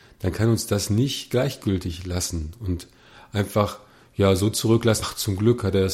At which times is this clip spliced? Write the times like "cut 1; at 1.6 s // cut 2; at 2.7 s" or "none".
cut 1; at 5.0 s